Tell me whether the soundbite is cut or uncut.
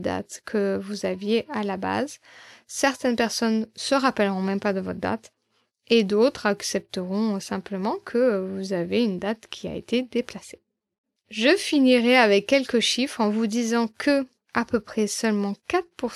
uncut